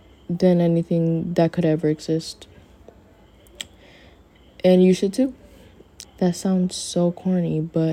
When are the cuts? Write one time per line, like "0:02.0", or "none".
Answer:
0:06.0